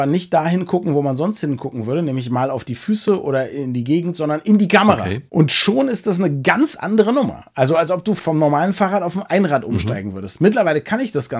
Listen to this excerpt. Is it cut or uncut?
uncut